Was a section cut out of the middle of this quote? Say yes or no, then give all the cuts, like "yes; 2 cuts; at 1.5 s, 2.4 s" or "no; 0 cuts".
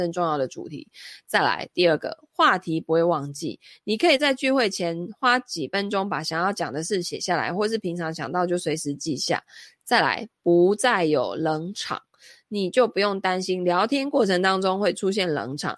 no; 0 cuts